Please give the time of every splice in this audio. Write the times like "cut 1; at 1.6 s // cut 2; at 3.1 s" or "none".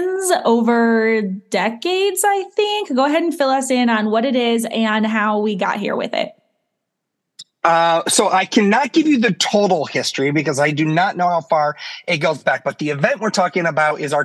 none